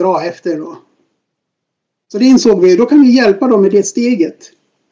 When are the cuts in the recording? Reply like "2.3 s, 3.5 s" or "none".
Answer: none